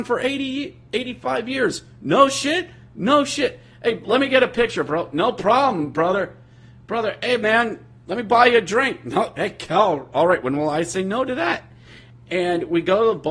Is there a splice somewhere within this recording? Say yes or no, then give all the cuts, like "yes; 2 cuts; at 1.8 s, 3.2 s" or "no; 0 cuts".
no; 0 cuts